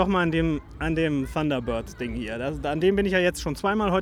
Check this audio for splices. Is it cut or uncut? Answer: uncut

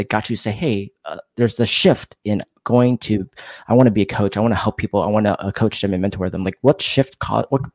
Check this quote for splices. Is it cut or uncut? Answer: uncut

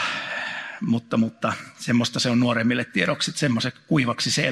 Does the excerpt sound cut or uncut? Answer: uncut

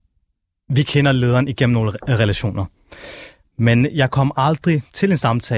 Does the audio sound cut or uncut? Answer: uncut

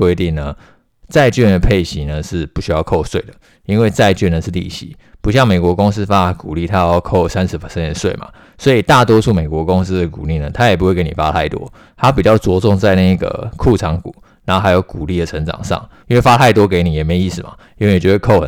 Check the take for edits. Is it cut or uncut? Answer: cut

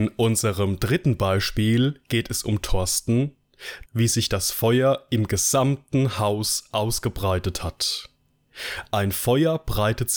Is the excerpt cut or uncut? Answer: cut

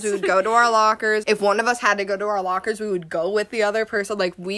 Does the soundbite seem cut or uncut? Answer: cut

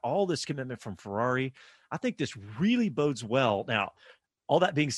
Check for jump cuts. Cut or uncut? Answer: uncut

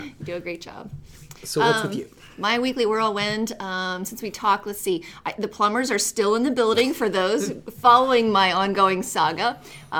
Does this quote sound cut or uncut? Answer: uncut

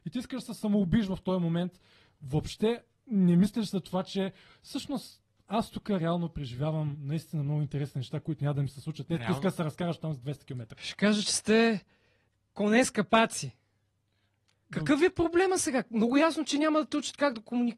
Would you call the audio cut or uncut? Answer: cut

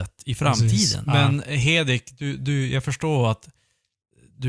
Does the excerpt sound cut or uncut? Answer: cut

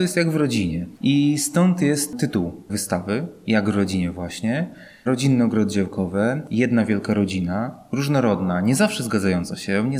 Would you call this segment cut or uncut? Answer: uncut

